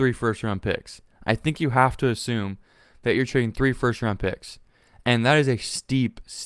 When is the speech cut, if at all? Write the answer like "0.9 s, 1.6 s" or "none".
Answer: none